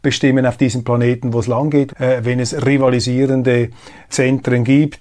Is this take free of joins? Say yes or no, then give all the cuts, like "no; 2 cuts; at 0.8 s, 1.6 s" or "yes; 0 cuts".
no; 2 cuts; at 1.9 s, 4.1 s